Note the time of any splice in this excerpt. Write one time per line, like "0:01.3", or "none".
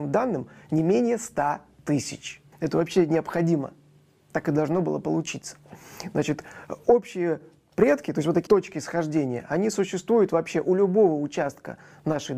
0:02.5
0:08.5